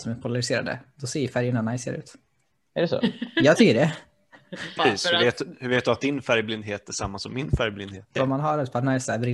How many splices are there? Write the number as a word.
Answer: two